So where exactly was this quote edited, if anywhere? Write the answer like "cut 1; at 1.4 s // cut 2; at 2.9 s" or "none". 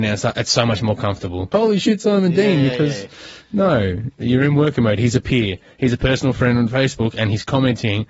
cut 1; at 1.5 s

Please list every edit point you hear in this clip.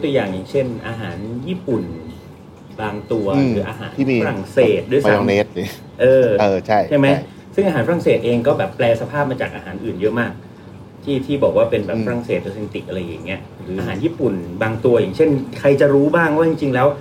cut 1; at 13.8 s

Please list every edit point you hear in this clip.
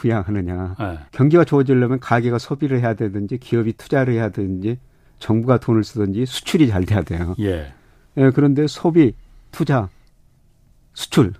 cut 1; at 1.1 s

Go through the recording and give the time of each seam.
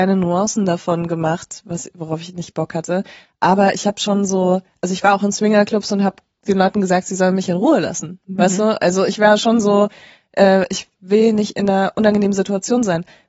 none

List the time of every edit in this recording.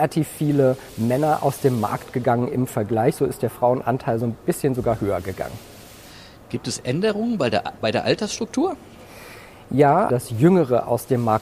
cut 1; at 10.1 s

